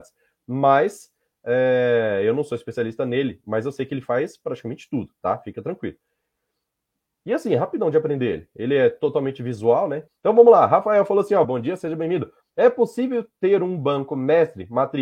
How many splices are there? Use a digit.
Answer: 2